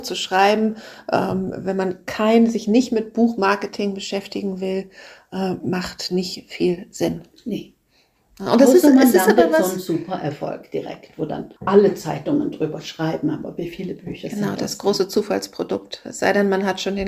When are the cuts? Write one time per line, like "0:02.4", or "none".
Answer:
0:11.6